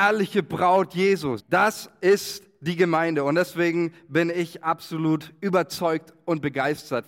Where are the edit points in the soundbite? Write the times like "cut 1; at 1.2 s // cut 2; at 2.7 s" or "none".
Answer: cut 1; at 1.4 s